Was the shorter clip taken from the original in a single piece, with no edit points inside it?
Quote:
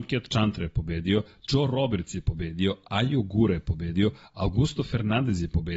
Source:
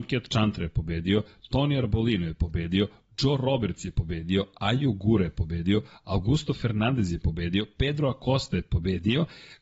no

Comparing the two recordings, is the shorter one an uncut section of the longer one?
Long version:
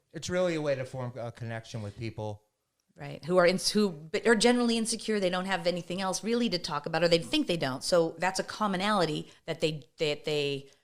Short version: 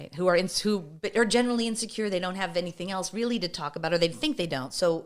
yes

